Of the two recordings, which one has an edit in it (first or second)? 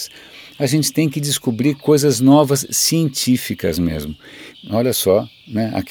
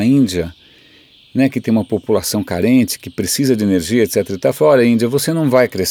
first